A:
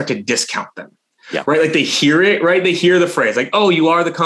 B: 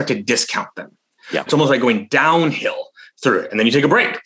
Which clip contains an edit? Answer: B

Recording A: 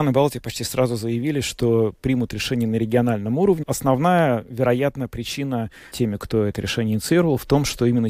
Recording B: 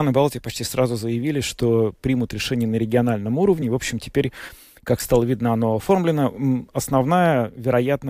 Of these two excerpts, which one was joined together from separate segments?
A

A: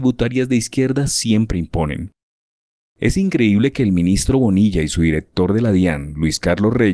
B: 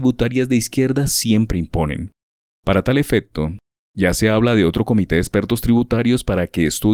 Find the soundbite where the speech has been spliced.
B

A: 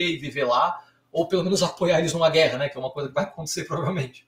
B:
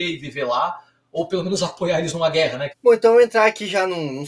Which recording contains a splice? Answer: B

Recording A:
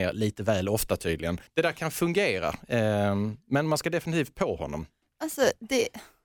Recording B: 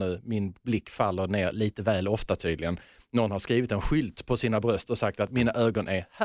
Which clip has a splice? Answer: A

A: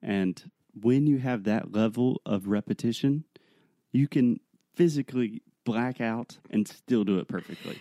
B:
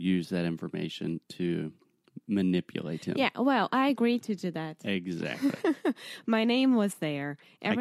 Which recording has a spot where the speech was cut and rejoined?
A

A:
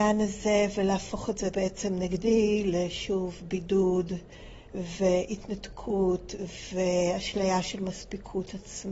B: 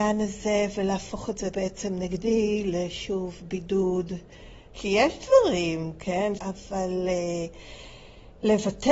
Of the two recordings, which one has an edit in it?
B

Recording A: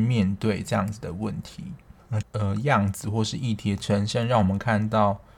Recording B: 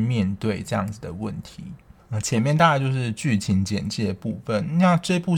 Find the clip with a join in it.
A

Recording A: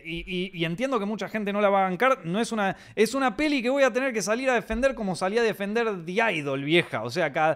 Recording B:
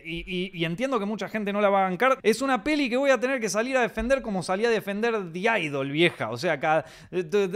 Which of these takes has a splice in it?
B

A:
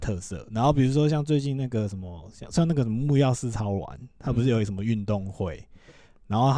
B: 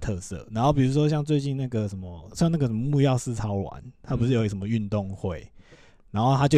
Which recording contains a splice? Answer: B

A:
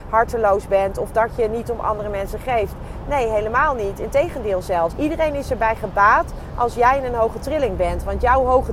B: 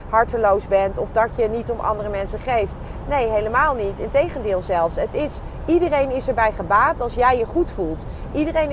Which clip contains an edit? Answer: A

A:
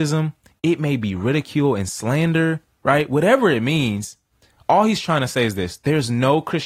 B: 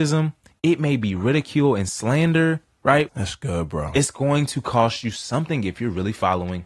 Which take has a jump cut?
B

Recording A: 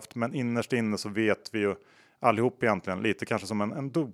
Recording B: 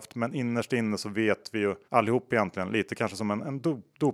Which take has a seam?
B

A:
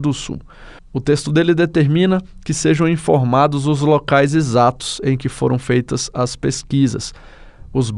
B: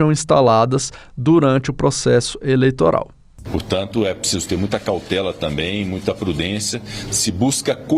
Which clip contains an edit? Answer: B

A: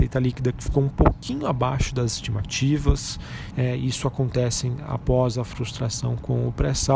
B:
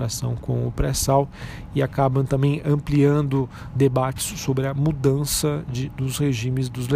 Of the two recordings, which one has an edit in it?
A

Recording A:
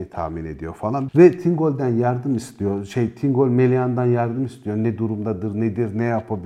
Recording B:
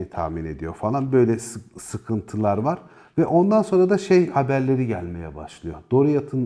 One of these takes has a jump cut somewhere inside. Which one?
A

